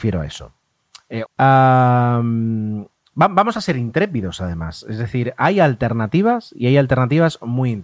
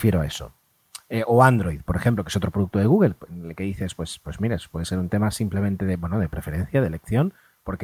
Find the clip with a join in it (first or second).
first